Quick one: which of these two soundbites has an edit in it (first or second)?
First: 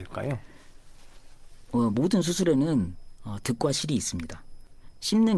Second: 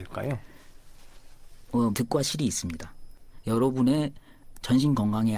second